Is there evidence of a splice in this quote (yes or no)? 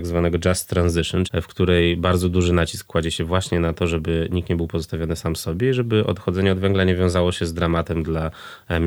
yes